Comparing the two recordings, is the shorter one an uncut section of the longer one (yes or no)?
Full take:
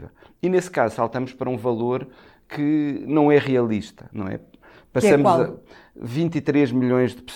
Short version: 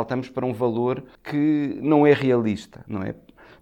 no